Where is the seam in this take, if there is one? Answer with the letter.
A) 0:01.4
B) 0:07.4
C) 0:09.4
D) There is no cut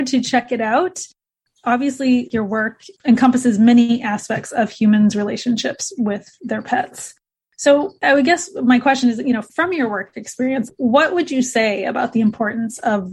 D